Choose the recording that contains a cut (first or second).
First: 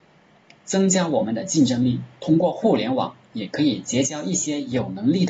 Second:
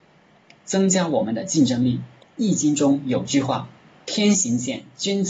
second